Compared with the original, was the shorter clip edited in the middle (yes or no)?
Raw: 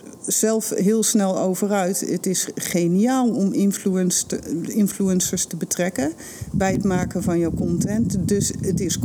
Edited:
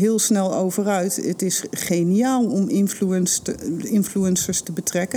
no